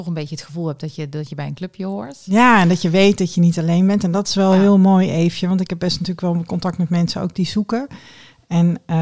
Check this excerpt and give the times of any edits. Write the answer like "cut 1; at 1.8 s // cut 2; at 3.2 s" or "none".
none